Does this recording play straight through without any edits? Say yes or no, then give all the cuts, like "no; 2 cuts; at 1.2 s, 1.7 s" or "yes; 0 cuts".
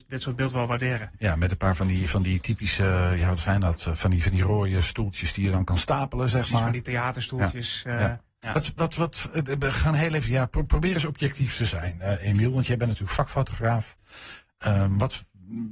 yes; 0 cuts